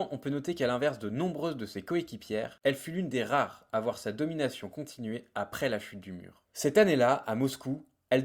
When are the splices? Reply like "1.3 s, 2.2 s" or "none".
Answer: 6.5 s